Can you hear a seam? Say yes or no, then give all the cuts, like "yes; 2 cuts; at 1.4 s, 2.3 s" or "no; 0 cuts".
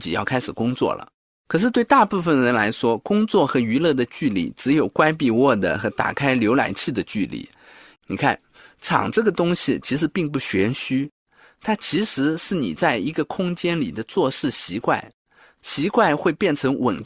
yes; 1 cut; at 8.0 s